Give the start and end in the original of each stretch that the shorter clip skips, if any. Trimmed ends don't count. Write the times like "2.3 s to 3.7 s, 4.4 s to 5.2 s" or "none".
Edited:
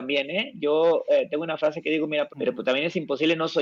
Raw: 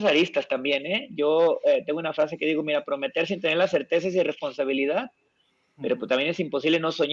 2.9 s to 5.7 s